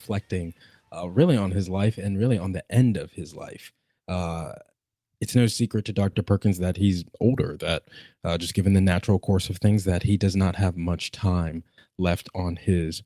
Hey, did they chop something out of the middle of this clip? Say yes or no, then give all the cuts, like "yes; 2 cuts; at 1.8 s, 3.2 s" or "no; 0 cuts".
no; 0 cuts